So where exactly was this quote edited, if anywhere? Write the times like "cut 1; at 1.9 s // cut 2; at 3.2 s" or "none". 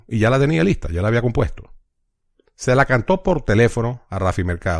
none